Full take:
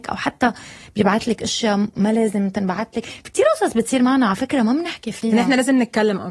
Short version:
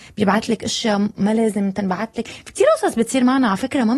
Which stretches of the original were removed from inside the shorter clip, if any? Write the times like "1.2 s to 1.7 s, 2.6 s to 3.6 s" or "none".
none